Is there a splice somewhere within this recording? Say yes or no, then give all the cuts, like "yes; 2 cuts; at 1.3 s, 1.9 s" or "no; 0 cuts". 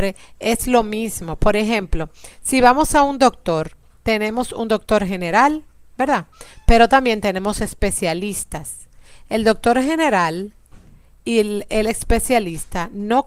no; 0 cuts